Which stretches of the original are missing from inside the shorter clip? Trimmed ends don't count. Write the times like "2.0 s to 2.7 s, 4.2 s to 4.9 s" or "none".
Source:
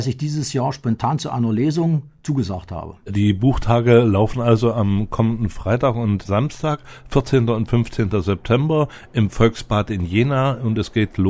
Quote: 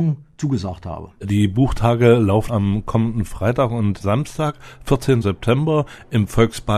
4.3 s to 4.7 s, 7.5 s to 8.2 s